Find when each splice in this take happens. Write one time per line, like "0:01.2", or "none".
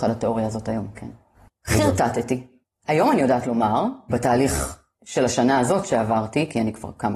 0:01.5
0:04.1